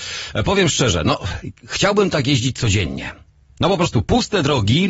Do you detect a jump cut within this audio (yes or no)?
no